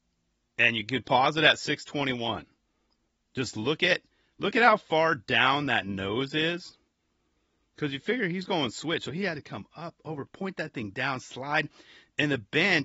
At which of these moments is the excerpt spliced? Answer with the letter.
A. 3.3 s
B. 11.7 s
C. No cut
C